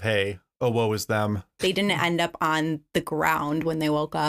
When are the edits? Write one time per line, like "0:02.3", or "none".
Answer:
0:01.6